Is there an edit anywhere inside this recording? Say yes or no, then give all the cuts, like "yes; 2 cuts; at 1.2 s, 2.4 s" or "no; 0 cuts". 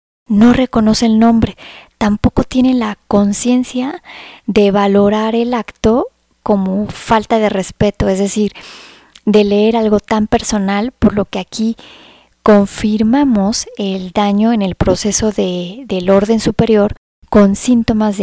no; 0 cuts